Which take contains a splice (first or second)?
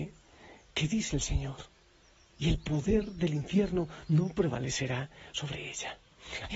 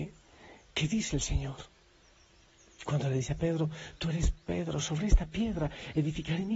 first